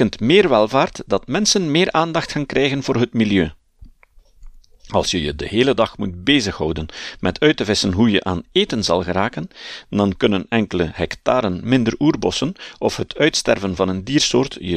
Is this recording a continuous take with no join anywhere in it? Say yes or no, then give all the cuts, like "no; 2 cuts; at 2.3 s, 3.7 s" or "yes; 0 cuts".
yes; 0 cuts